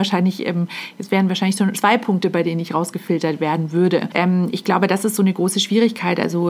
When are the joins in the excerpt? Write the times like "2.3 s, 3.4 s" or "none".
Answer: 1.7 s